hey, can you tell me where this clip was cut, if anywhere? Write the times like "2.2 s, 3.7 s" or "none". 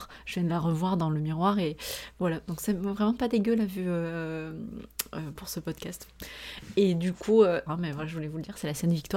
5.4 s, 7.7 s